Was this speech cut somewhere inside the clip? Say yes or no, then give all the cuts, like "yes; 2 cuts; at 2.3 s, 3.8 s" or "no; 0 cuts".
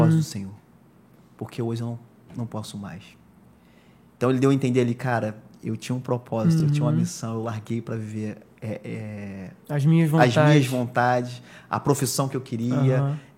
no; 0 cuts